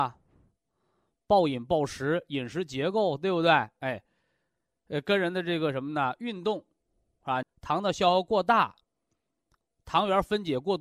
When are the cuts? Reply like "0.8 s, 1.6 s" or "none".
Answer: 7.4 s, 9.6 s